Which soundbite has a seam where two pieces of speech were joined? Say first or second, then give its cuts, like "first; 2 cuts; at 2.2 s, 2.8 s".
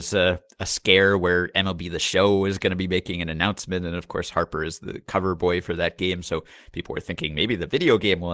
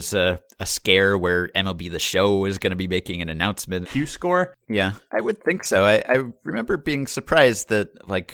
second; 1 cut; at 3.8 s